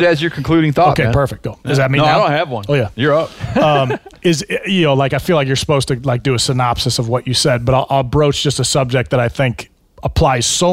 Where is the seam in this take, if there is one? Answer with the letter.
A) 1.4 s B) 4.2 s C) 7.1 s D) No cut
D